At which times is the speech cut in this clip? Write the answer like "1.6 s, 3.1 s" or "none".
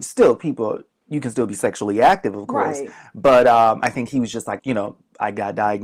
4.6 s

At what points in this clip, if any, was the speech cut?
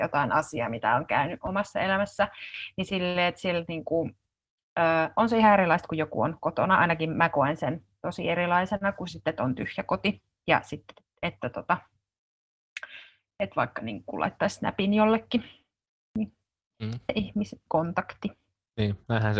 none

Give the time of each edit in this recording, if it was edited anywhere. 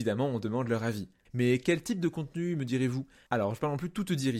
1.3 s, 3.3 s

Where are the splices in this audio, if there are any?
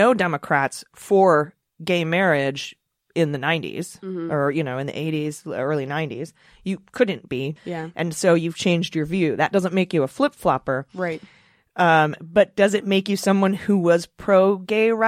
7.6 s

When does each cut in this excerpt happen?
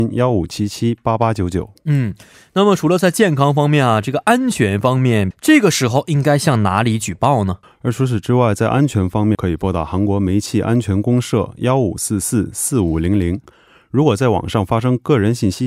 5.3 s, 7.6 s, 9.3 s

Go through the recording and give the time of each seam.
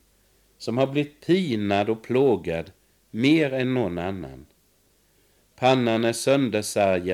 none

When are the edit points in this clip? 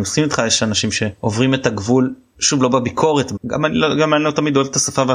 3.4 s

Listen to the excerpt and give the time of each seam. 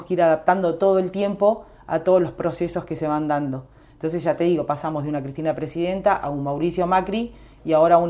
none

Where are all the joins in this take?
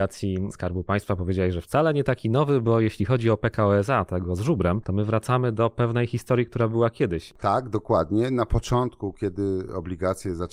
none

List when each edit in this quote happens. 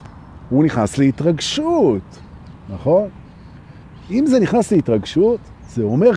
none

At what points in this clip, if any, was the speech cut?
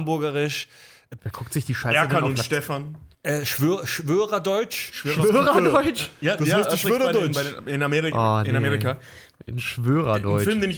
1.2 s, 3.1 s

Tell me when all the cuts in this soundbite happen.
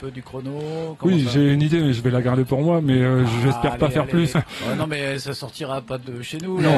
4.3 s

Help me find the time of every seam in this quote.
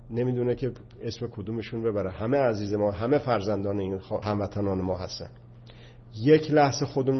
4.2 s

